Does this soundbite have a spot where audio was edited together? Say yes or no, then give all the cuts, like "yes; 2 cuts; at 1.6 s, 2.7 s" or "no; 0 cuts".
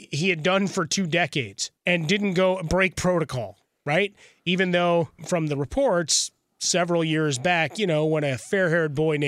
yes; 2 cuts; at 1.8 s, 5.2 s